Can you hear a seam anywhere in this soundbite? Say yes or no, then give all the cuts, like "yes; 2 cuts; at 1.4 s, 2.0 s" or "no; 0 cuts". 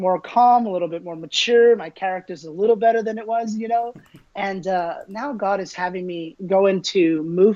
no; 0 cuts